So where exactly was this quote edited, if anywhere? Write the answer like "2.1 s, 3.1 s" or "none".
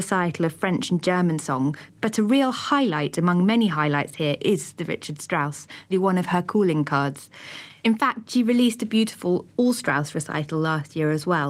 5.9 s